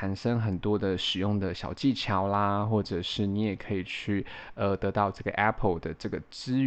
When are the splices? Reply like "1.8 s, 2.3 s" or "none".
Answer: none